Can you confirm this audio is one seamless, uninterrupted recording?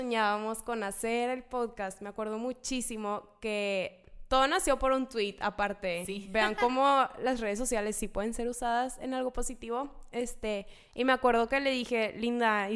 yes; 0 cuts

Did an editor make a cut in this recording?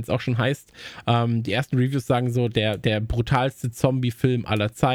no; 0 cuts

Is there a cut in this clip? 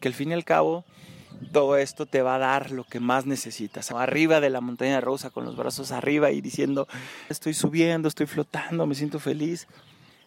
yes; 2 cuts; at 3.9 s, 7.3 s

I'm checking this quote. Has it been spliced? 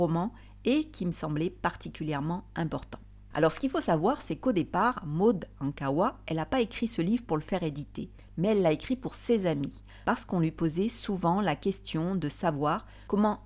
no; 0 cuts

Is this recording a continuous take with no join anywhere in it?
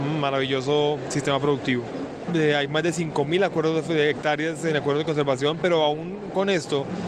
no; 1 cut; at 2.3 s

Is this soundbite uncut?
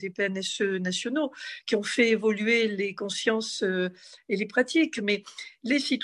yes; 0 cuts

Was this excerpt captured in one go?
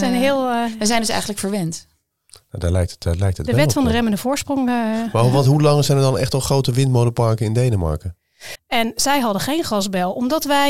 no; 1 cut; at 8.5 s

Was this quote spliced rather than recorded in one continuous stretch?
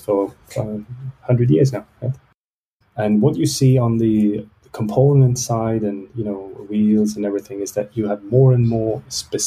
yes; 1 cut; at 2.8 s

